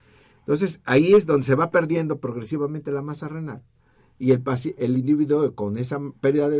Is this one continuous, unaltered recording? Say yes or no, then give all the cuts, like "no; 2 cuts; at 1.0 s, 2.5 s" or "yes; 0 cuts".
no; 1 cut; at 4.8 s